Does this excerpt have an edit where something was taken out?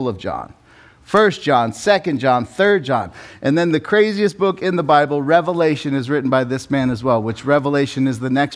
no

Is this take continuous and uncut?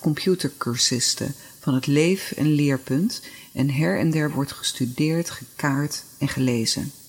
yes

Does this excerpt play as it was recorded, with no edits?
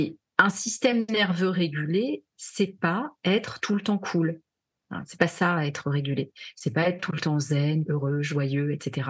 no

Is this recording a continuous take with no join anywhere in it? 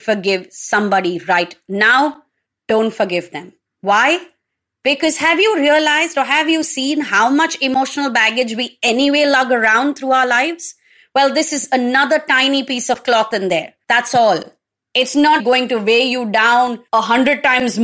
no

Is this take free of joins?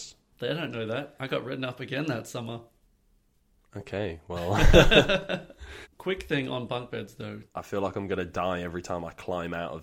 no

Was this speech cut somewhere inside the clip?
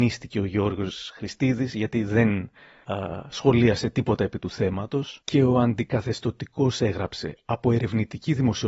no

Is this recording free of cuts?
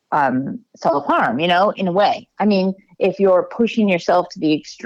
yes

